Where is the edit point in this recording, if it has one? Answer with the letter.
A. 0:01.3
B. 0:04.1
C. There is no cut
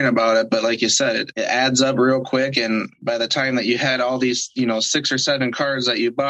A